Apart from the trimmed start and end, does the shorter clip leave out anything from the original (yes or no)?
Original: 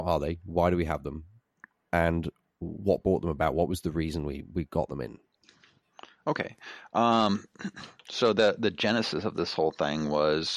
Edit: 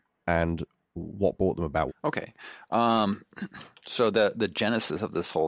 yes